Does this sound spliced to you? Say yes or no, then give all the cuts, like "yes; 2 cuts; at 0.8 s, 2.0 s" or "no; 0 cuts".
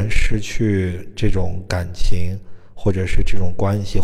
no; 0 cuts